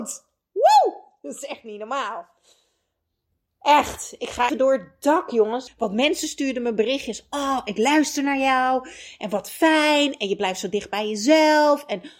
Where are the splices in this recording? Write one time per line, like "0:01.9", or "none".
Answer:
0:04.5
0:05.7